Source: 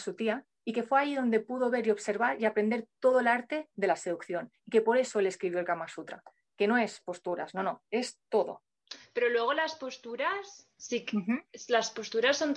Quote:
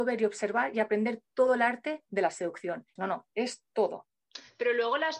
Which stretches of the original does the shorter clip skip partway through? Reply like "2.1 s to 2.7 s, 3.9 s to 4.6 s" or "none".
4.6 s to 7.5 s